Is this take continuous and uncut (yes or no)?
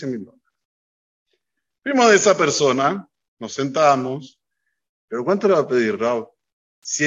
no